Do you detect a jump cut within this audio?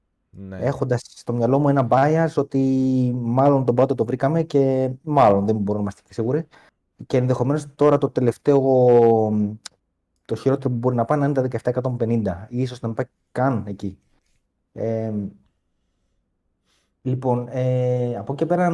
no; 0 cuts

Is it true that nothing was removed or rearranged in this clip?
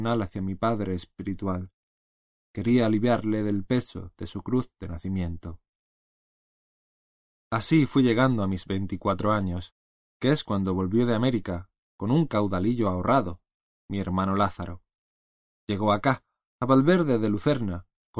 yes; 0 cuts

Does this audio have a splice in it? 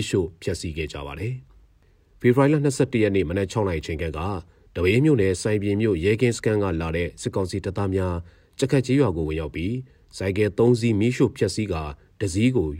no; 0 cuts

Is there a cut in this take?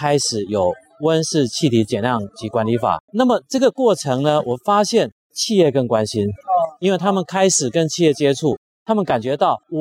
yes; 1 cut; at 3.1 s

